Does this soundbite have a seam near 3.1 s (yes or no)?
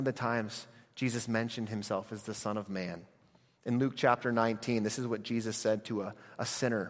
no